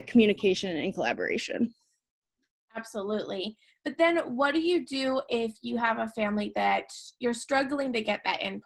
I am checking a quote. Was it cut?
no; 0 cuts

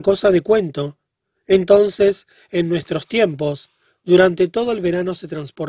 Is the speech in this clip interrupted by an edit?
yes; 1 cut; at 1.3 s

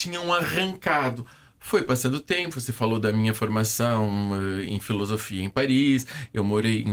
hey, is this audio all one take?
yes; 0 cuts

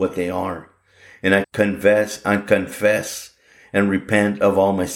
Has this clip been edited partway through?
yes; 1 cut; at 1.4 s

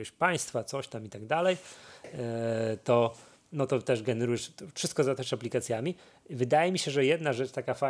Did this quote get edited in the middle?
no; 0 cuts

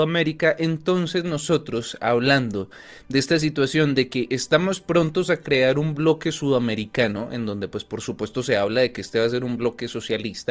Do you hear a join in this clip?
no; 0 cuts

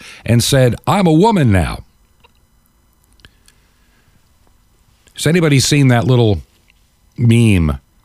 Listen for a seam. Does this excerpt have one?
no; 0 cuts

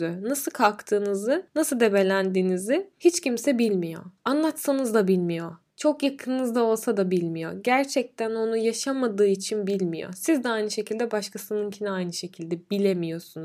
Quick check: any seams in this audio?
no; 0 cuts

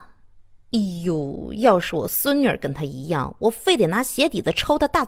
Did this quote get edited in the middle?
no; 0 cuts

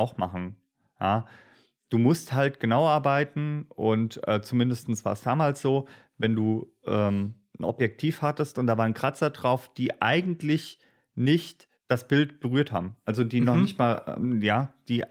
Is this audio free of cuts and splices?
yes; 0 cuts

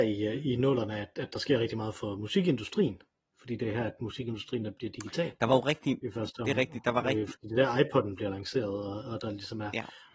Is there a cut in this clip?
no; 0 cuts

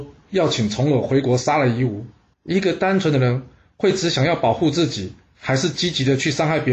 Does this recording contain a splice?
yes; 1 cut; at 2.3 s

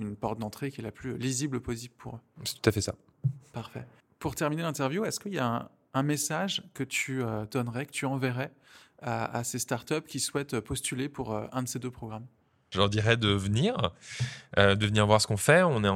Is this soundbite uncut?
yes; 0 cuts

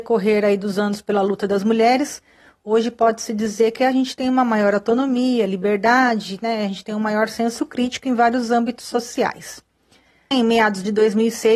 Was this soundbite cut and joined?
yes; 1 cut; at 10.3 s

